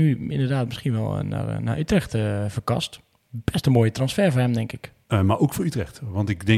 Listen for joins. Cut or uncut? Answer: uncut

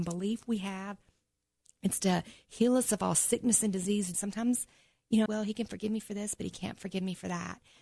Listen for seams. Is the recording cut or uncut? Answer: cut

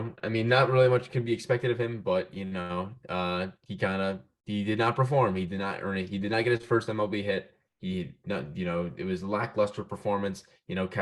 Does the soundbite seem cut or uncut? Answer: uncut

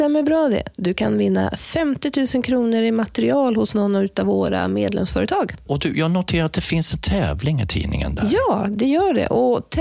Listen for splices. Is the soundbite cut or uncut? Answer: cut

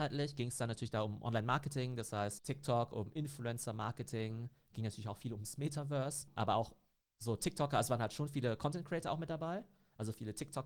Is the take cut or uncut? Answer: uncut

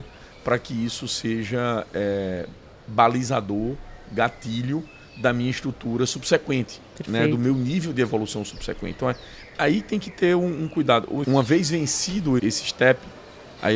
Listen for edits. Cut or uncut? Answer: cut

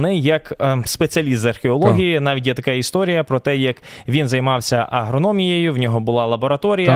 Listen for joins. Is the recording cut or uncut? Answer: uncut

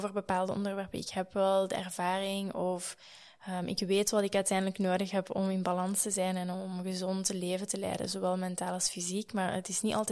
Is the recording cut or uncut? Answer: uncut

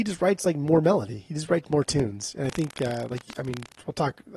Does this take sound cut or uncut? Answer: uncut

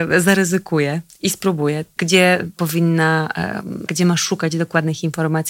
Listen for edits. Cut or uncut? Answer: cut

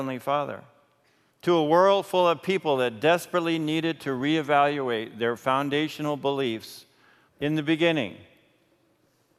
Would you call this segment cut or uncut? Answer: cut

